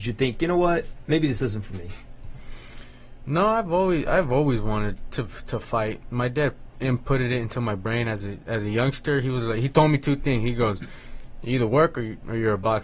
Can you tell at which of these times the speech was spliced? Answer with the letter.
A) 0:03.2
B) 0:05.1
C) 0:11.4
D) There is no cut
D